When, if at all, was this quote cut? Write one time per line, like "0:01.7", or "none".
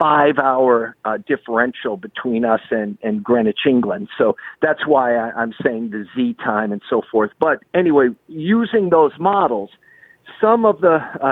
0:07.3

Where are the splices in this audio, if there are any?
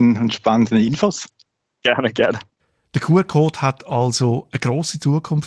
none

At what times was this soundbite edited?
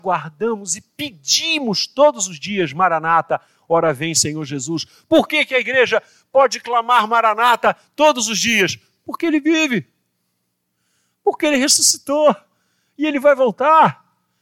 none

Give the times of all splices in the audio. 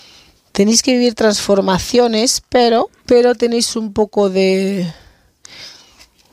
0:03.0

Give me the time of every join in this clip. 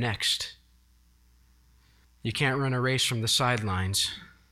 0:02.0

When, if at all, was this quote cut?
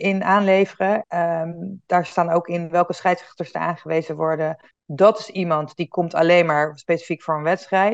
0:01.0
0:04.7

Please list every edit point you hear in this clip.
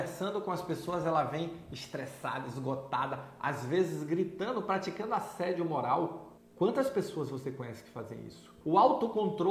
0:08.6

